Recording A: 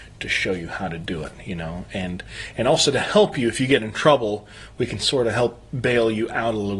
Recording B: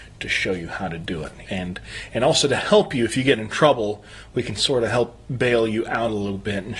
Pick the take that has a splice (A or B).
B